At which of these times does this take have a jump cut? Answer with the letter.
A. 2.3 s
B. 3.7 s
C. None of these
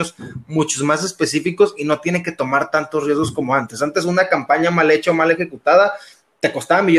C